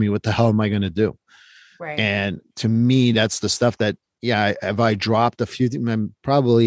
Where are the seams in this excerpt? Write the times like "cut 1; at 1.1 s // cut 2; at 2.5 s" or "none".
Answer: none